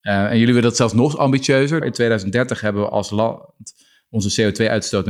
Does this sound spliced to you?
yes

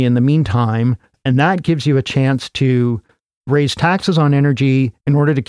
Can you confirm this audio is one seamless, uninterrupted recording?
yes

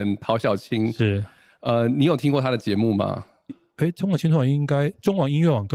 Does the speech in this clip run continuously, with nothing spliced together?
no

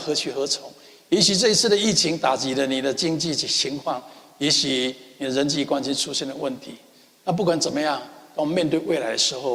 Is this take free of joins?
yes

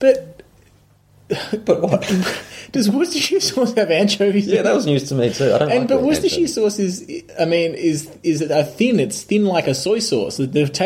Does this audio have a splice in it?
no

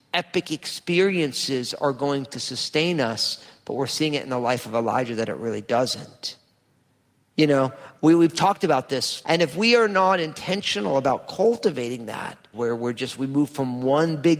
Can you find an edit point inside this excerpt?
yes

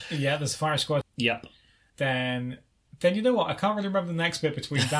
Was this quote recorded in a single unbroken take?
no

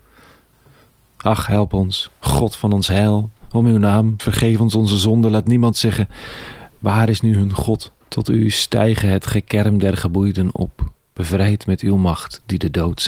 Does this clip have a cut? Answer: yes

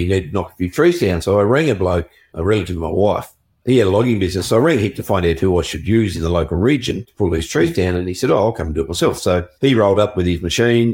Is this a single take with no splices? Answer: yes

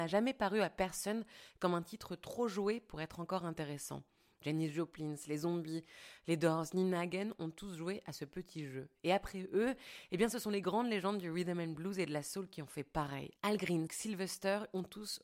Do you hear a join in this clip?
yes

